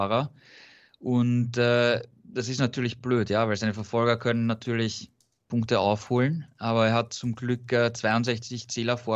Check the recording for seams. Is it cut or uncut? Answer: uncut